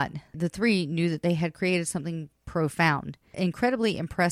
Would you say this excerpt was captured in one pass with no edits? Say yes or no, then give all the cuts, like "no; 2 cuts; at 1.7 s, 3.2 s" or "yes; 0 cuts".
yes; 0 cuts